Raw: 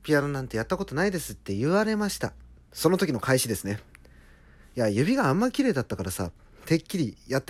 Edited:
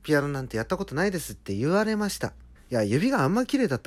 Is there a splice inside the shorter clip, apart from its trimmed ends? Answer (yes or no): yes